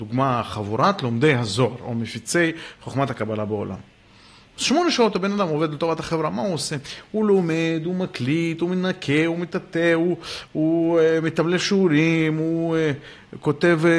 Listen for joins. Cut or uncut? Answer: uncut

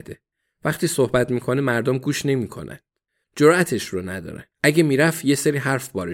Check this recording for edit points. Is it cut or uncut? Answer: cut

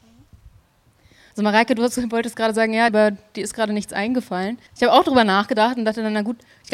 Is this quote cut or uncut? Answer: cut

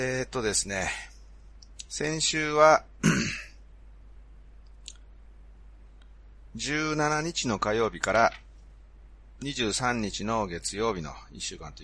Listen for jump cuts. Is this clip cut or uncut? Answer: uncut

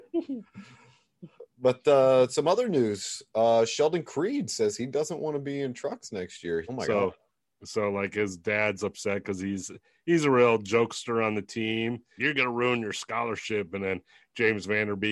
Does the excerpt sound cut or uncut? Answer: cut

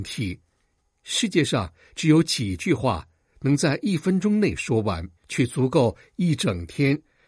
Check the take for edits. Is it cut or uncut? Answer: cut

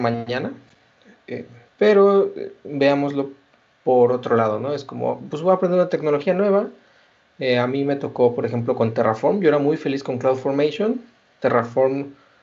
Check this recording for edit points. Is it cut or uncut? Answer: cut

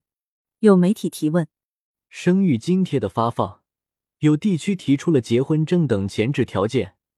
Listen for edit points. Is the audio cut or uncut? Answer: uncut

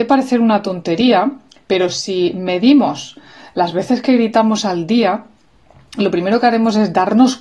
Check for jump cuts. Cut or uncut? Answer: uncut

